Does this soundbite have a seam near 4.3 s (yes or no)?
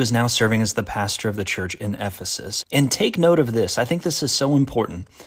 no